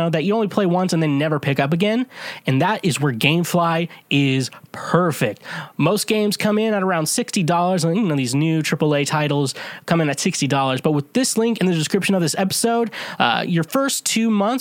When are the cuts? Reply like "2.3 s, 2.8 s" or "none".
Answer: none